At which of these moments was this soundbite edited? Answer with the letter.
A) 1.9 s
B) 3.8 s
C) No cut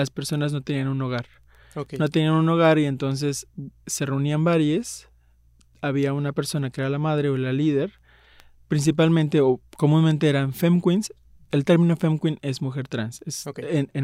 B